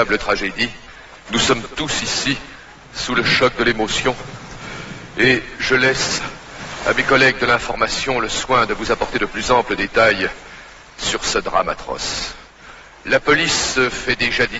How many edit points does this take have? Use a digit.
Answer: 1